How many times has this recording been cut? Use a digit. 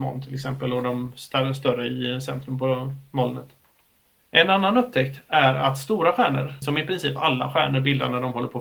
1